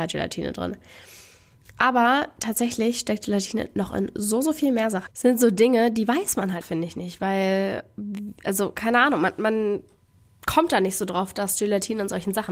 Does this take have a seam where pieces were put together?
yes; 2 cuts; at 5.1 s, 6.6 s

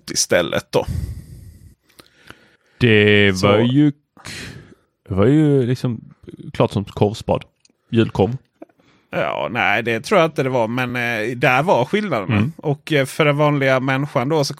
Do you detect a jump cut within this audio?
no; 0 cuts

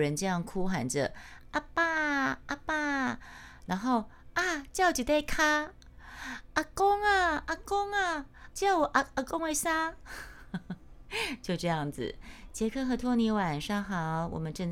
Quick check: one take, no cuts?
no; 1 cut; at 8.5 s

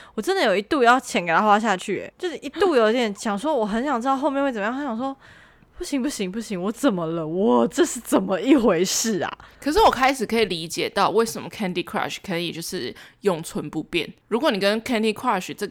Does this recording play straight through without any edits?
yes; 0 cuts

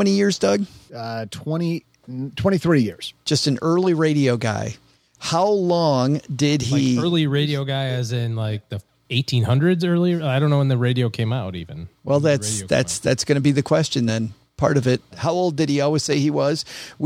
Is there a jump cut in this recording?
no; 0 cuts

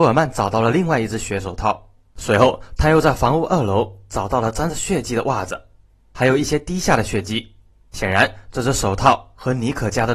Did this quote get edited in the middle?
no; 0 cuts

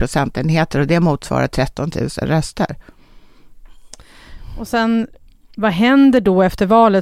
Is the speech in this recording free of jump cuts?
yes; 0 cuts

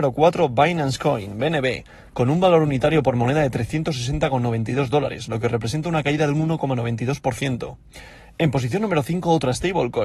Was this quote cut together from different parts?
no; 0 cuts

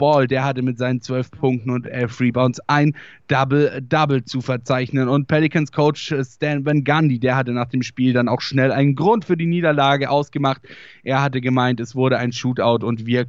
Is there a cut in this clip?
no; 0 cuts

